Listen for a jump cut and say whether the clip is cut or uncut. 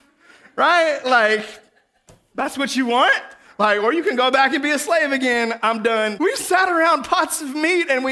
cut